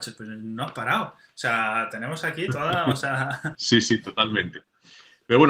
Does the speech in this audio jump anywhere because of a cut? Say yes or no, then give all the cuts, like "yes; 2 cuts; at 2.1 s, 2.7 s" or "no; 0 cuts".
yes; 1 cut; at 3.5 s